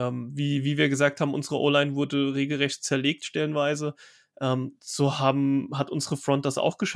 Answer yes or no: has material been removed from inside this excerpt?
no